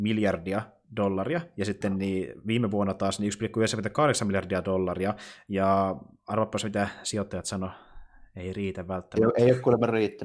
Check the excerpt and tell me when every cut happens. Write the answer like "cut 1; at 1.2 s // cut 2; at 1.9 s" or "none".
none